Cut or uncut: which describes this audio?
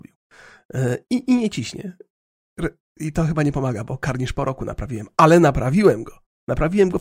uncut